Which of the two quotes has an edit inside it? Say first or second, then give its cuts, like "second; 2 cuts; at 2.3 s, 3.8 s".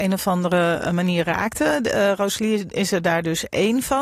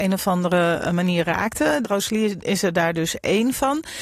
second; 1 cut; at 1.8 s